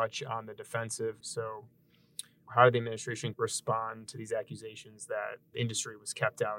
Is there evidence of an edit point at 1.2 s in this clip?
yes; 1 cut; at 1.2 s

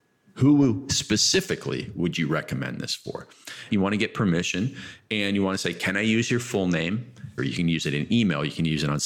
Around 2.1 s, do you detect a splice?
no; 2 cuts; at 3.7 s, 7.4 s

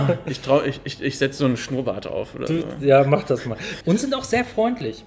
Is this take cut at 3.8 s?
yes; 1 cut; at 3.8 s

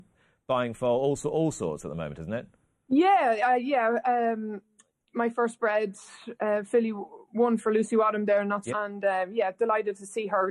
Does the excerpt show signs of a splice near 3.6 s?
no; 1 cut; at 8.7 s

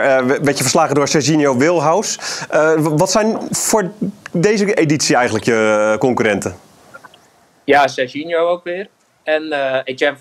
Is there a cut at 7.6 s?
no; 0 cuts

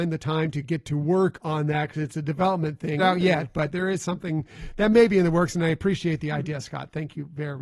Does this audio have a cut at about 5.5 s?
no; 1 cut; at 3.0 s

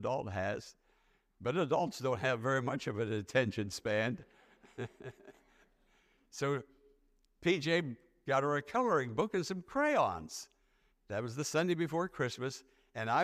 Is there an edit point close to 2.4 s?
no; 1 cut; at 10.9 s

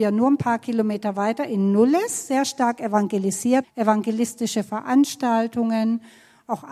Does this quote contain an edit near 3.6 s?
yes; 1 cut; at 3.6 s

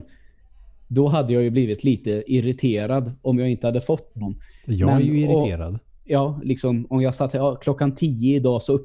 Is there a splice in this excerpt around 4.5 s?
no; 1 cut; at 6.4 s

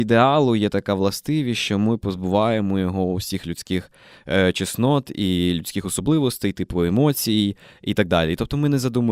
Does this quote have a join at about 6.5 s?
no; 0 cuts

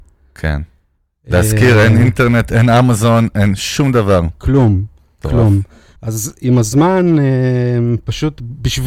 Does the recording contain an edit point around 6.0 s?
yes; 1 cut; at 6.0 s

